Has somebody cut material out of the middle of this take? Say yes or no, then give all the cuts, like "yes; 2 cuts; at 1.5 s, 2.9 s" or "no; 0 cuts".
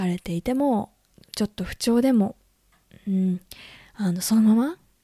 no; 0 cuts